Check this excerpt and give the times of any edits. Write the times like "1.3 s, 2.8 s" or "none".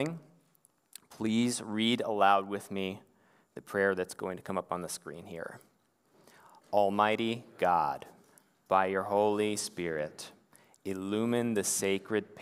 none